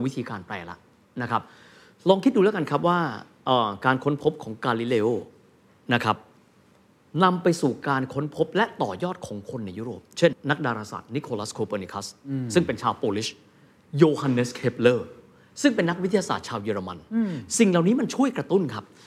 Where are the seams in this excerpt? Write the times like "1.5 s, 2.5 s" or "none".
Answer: 10.3 s